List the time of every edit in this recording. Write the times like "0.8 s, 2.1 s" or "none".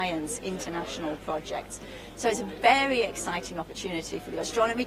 none